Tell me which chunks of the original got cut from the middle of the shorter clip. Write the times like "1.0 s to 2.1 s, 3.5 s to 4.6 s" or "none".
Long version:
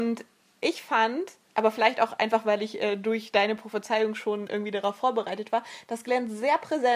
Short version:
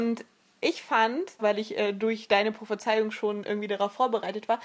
1.4 s to 2.4 s